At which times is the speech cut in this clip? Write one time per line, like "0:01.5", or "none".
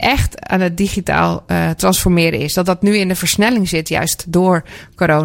none